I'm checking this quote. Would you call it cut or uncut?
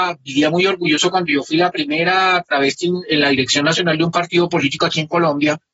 uncut